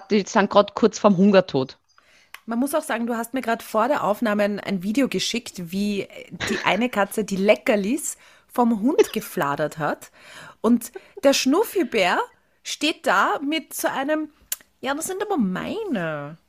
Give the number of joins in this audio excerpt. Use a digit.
0